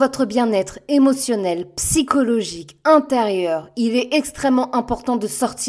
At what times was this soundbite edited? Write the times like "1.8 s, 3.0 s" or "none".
none